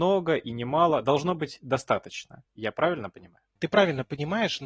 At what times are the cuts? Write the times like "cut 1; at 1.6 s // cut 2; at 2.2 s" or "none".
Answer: none